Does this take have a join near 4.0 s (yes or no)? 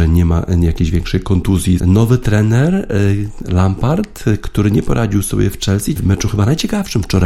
no